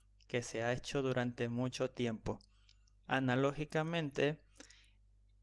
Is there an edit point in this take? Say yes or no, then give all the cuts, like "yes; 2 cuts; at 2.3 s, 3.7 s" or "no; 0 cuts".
yes; 1 cut; at 3.0 s